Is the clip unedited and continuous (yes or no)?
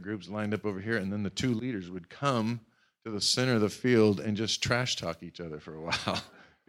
yes